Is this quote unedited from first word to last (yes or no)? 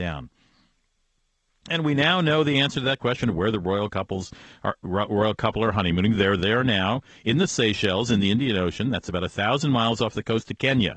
yes